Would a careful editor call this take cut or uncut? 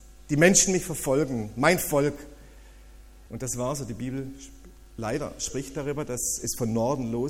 cut